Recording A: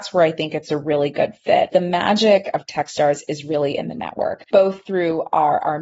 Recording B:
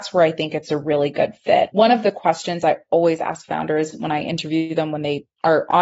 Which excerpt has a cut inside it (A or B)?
A